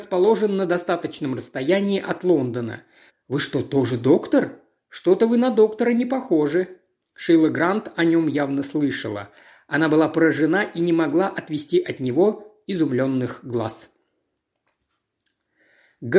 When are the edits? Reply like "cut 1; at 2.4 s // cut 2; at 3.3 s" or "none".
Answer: cut 1; at 3.1 s // cut 2; at 7.0 s

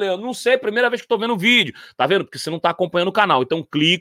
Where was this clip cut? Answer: none

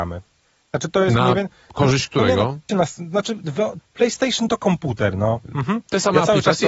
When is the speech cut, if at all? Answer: cut 1; at 2.7 s // cut 2; at 3.8 s // cut 3; at 5.5 s

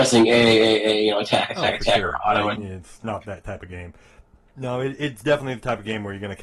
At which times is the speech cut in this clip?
cut 1; at 2.6 s

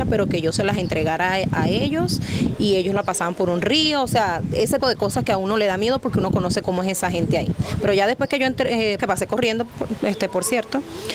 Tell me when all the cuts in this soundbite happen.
cut 1; at 4.8 s // cut 2; at 6.6 s // cut 3; at 9.0 s

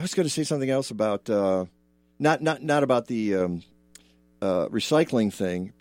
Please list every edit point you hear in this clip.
none

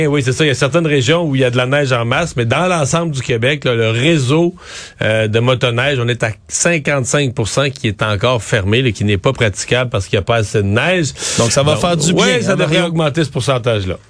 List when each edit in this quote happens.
none

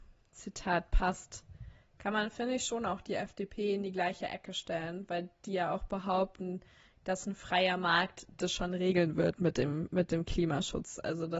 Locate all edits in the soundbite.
none

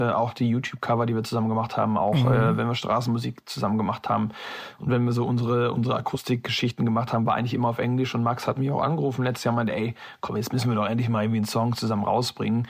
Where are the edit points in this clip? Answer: none

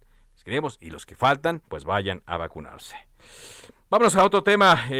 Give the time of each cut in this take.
cut 1; at 1.7 s

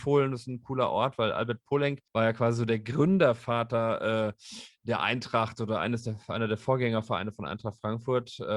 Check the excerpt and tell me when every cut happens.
cut 1; at 2.1 s

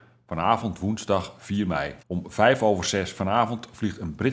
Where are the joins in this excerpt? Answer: cut 1; at 2.0 s

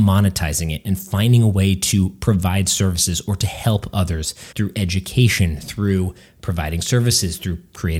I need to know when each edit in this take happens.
cut 1; at 4.5 s

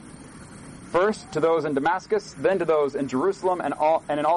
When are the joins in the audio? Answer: none

